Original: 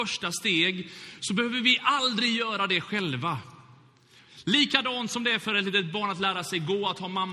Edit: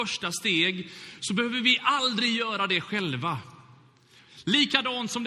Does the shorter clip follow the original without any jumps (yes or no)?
yes